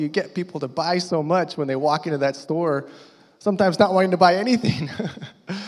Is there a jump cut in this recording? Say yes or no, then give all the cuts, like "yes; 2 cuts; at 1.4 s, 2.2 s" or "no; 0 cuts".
no; 0 cuts